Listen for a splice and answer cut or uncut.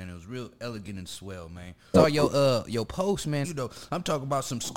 cut